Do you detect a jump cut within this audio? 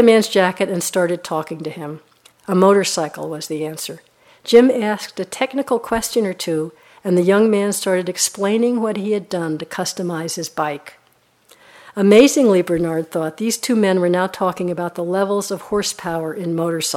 yes; 1 cut; at 2.3 s

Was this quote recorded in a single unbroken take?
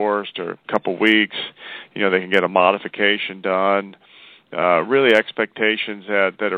yes; 0 cuts

